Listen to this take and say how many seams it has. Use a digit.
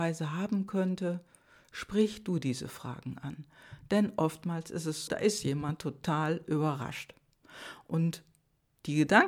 1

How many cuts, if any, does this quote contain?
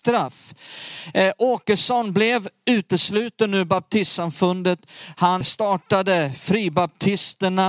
1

